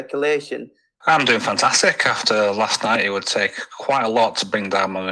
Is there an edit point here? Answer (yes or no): yes